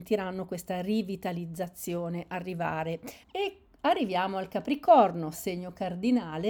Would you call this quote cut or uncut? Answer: cut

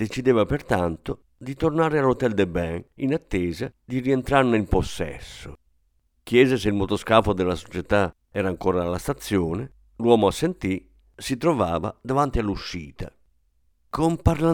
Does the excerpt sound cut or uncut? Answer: uncut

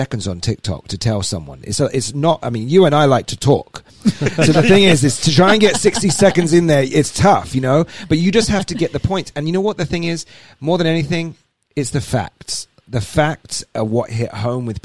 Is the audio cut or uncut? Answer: uncut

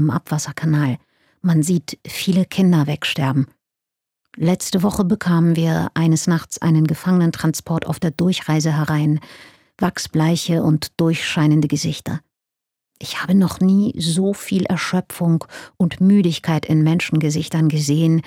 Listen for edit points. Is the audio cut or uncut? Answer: uncut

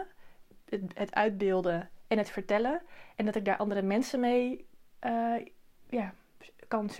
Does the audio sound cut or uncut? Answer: uncut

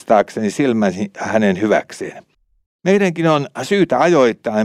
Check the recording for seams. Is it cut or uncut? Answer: cut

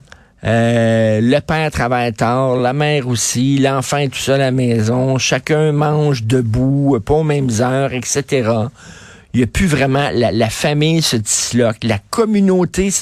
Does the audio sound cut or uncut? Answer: uncut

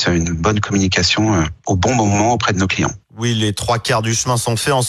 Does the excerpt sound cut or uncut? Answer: uncut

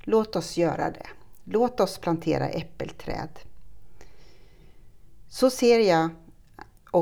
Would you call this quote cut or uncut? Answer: uncut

